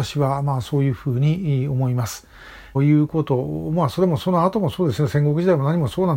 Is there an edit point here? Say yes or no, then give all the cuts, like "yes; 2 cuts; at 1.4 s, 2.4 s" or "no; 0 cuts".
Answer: yes; 1 cut; at 2.7 s